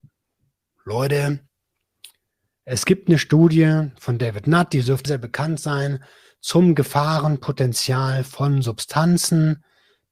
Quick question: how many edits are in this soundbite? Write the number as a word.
one